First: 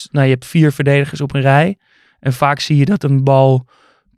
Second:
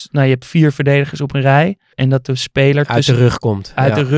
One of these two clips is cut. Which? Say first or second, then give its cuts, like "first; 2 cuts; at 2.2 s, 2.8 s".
second; 1 cut; at 1.9 s